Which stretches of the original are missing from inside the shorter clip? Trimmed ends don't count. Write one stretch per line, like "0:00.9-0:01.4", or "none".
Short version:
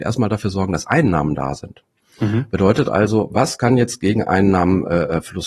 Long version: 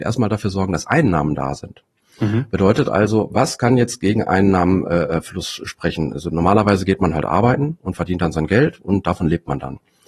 none